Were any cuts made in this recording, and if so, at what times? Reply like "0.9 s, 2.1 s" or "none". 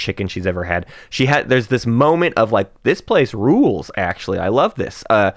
none